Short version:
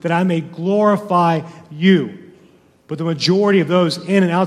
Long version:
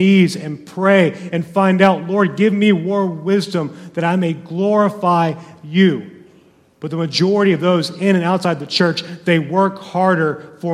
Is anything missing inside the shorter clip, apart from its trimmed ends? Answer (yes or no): no